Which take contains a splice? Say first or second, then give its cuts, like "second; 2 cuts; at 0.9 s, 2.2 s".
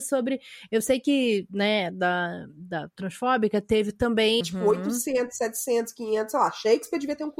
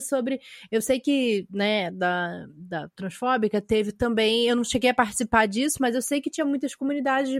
first; 1 cut; at 4.4 s